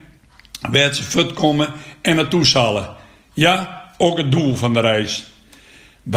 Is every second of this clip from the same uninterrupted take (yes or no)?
yes